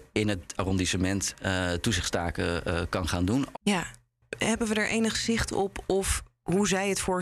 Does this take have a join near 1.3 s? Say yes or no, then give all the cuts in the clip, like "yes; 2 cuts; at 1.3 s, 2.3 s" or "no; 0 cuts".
no; 1 cut; at 3.5 s